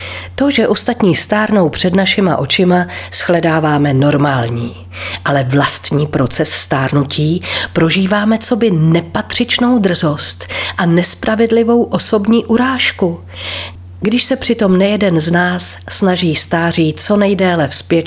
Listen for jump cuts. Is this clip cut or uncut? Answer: uncut